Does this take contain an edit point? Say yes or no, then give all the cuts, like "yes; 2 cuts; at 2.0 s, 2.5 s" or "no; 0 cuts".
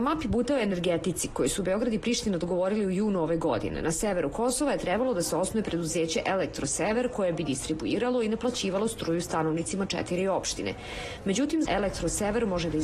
yes; 1 cut; at 11.6 s